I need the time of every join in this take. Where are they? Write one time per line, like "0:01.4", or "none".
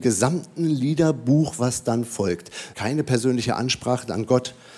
0:02.7